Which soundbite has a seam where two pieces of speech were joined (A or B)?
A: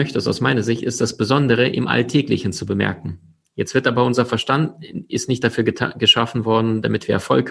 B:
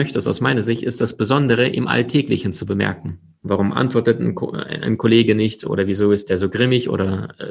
B